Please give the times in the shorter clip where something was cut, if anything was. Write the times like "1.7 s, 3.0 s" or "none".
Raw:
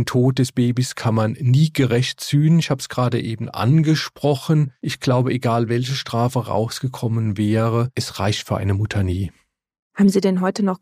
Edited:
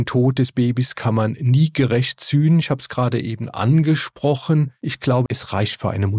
5.3 s